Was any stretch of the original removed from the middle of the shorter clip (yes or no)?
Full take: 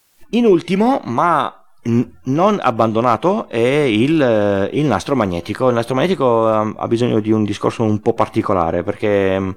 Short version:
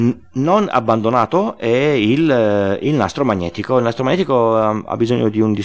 no